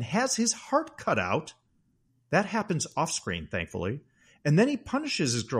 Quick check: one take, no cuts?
yes; 0 cuts

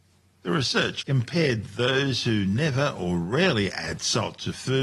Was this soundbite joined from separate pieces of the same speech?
yes; 1 cut; at 1.0 s

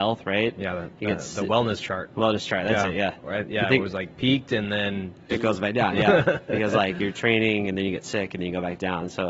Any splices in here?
no; 0 cuts

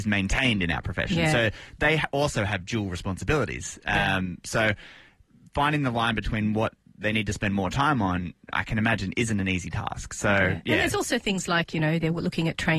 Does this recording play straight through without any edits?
yes; 0 cuts

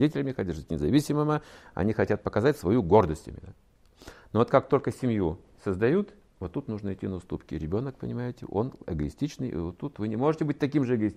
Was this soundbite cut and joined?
no; 0 cuts

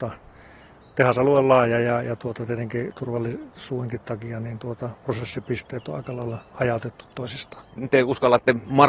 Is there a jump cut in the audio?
no; 0 cuts

